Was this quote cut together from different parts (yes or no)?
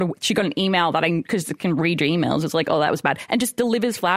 no